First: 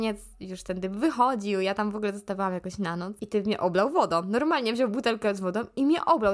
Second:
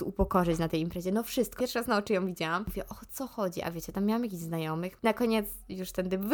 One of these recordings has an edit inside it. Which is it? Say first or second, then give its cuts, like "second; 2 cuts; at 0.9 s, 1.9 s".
second; 2 cuts; at 1.6 s, 5.0 s